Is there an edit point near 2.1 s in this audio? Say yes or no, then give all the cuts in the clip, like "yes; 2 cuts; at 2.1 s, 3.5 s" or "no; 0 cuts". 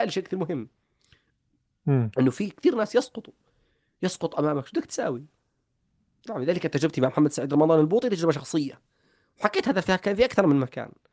no; 0 cuts